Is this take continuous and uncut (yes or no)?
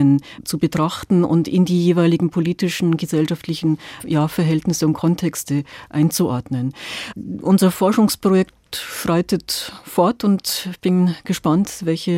yes